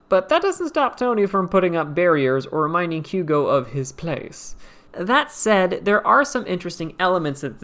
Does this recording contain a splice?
yes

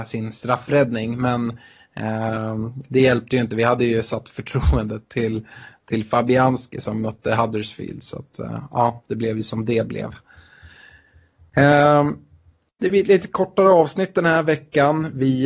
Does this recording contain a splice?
no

